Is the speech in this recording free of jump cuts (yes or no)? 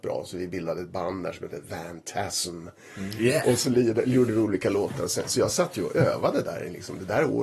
yes